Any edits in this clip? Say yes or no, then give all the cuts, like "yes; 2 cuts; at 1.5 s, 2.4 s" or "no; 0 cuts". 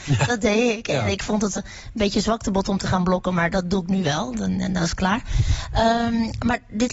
yes; 1 cut; at 1.6 s